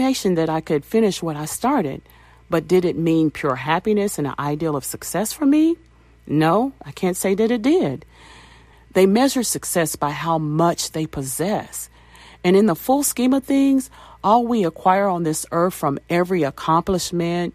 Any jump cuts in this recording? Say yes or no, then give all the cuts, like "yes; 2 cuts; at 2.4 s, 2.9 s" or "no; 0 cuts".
yes; 1 cut; at 8.7 s